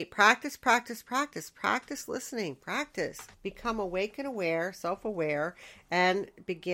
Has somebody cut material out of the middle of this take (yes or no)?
yes